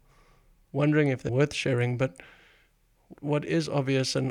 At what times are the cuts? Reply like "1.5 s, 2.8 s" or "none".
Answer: 1.3 s, 3.1 s